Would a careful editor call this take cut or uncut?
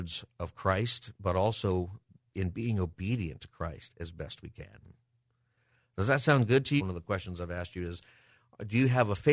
cut